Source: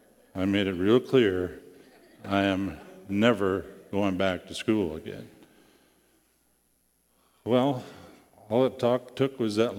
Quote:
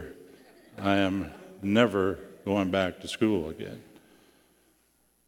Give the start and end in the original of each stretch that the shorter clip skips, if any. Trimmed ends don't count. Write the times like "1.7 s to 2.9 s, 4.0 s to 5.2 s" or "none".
none

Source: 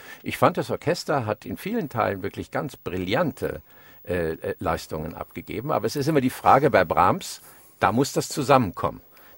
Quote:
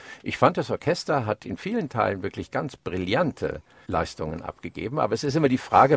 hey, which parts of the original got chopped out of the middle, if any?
3.8 s to 4.6 s

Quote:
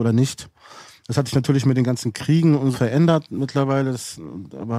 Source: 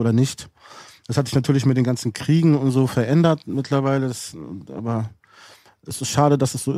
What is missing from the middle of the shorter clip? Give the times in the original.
2.7 s to 2.9 s

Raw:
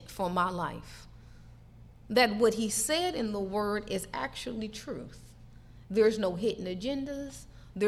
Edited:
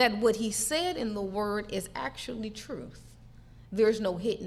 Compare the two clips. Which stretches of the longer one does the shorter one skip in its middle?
none

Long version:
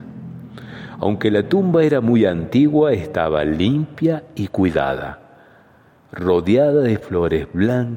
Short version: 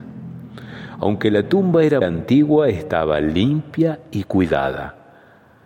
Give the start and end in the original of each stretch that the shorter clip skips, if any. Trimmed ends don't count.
2.0 s to 2.3 s

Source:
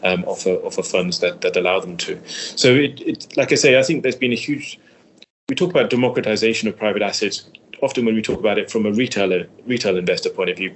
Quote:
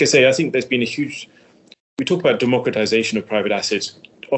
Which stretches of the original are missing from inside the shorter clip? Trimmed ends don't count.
none

